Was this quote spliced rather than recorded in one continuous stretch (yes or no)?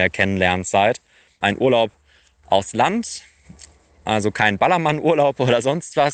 yes